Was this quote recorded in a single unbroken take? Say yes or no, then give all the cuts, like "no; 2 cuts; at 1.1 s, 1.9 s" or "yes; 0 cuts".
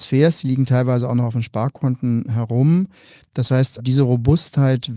no; 1 cut; at 3.8 s